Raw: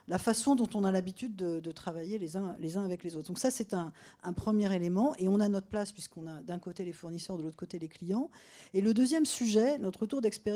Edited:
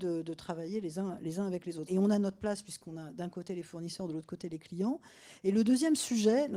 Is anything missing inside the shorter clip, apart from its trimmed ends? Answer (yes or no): yes